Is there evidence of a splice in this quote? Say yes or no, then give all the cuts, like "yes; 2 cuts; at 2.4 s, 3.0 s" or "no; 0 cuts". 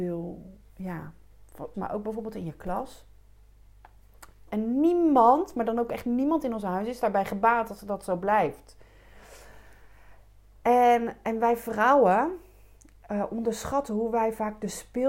yes; 2 cuts; at 1.7 s, 4.5 s